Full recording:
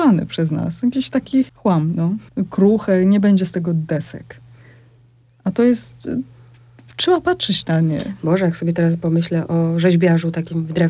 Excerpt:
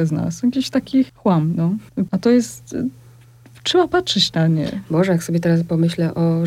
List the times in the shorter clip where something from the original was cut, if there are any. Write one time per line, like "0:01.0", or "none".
0:02.1